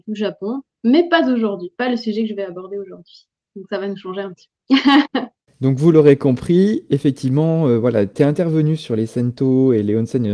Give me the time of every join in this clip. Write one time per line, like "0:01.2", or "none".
none